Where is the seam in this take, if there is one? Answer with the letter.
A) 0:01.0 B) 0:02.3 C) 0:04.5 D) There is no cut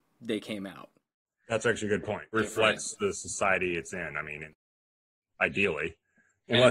B